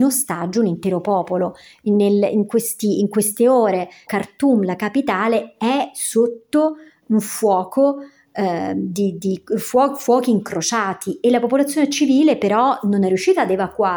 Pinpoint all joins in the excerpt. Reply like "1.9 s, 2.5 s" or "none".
4.1 s

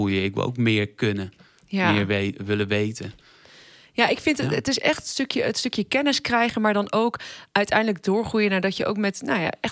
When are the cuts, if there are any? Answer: none

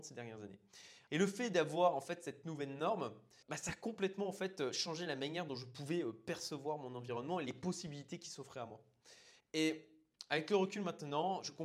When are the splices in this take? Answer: 1.1 s, 9.4 s

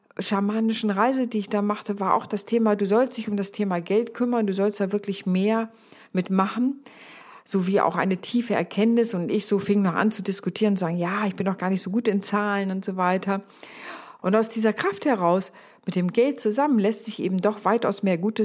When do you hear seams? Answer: 14.2 s

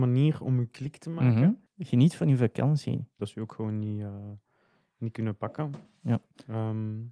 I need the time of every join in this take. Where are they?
1.7 s, 3.2 s

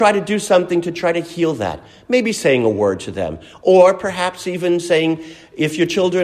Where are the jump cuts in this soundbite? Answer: none

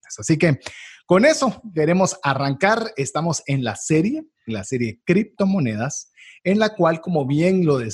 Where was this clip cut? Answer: none

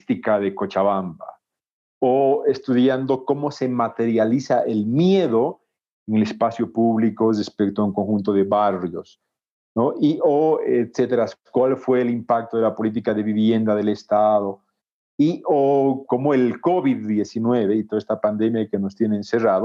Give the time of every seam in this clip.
16.1 s

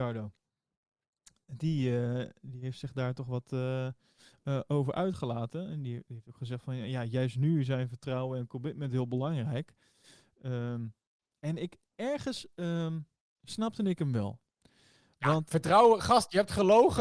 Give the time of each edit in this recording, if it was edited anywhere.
none

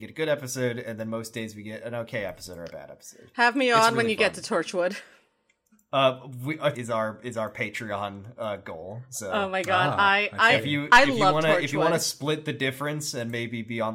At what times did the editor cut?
6.7 s

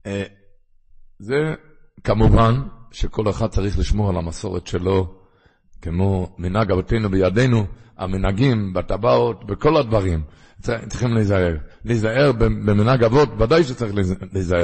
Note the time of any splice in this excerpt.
none

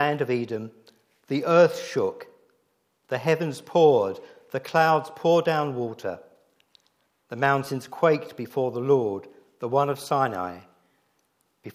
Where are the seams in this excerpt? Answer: none

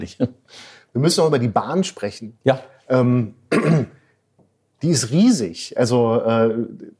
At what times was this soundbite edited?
none

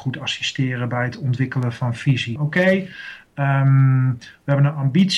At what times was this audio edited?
2.4 s

